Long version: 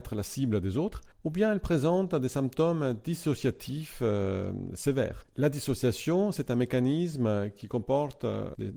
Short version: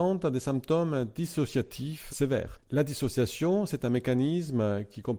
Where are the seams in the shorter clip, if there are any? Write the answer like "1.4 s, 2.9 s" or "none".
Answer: 2.1 s